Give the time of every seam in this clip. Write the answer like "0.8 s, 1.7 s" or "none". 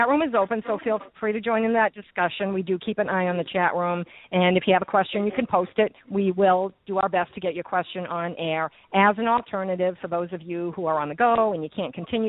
none